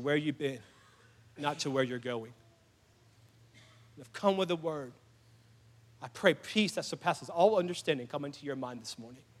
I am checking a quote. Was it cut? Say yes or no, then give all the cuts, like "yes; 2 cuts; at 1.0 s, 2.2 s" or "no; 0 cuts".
no; 0 cuts